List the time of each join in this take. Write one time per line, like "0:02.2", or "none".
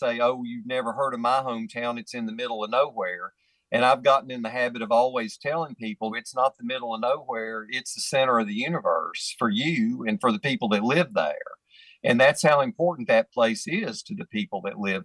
0:06.1